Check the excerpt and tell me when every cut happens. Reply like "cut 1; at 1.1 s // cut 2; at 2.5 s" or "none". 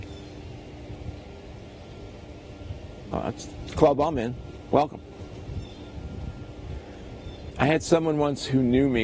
cut 1; at 3.1 s